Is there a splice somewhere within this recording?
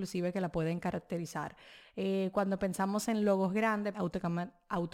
yes; 1 cut; at 3.9 s

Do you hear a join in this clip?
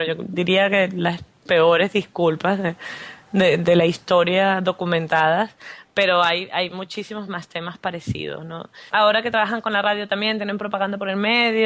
yes; 1 cut; at 8.9 s

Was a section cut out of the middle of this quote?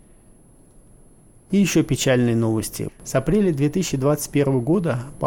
yes; 1 cut; at 2.9 s

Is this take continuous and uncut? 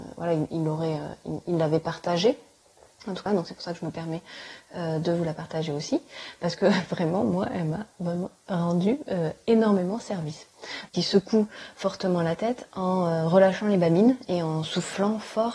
no; 2 cuts; at 3.3 s, 10.9 s

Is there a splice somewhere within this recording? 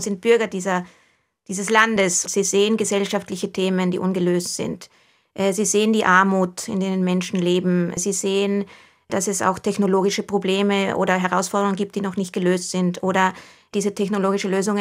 yes; 1 cut; at 2.3 s

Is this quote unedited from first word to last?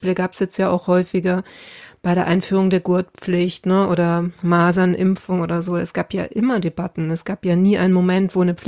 yes; 0 cuts

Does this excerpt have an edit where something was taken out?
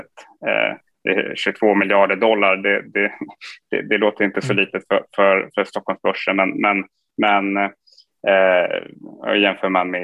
no; 0 cuts

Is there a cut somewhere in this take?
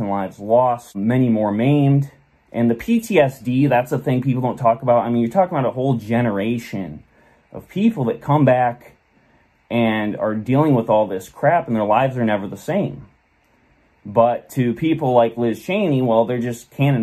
no; 0 cuts

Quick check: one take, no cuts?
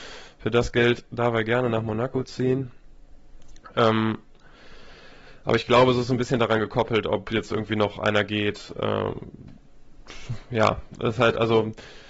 yes; 0 cuts

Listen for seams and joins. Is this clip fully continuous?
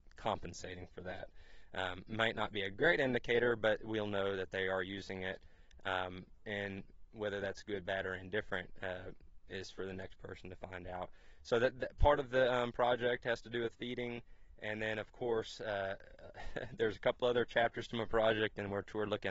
yes; 0 cuts

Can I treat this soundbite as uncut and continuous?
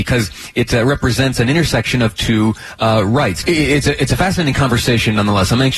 no; 1 cut; at 3.4 s

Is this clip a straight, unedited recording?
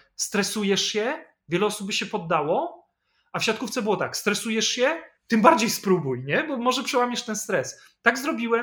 yes; 0 cuts

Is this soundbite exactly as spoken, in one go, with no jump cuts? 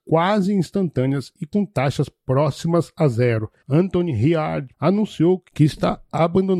no; 2 cuts; at 3.6 s, 4.7 s

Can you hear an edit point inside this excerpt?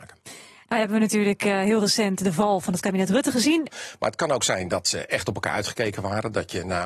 yes; 1 cut; at 3.6 s

